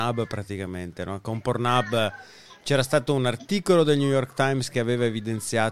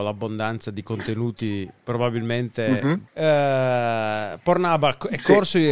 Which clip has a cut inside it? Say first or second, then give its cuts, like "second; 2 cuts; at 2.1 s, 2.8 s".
second; 1 cut; at 3.1 s